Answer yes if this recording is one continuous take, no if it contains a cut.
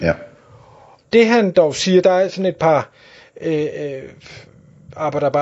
no